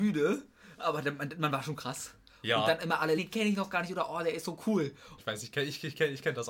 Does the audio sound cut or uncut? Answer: cut